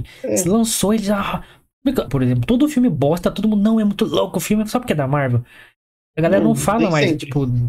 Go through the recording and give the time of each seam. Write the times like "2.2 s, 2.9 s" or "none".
2.1 s